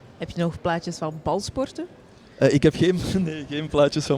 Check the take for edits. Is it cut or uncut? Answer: uncut